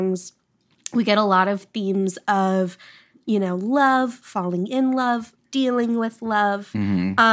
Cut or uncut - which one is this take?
cut